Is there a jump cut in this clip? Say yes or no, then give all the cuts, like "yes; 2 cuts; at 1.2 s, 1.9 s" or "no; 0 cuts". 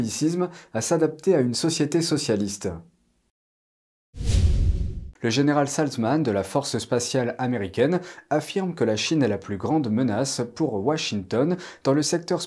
yes; 1 cut; at 5.2 s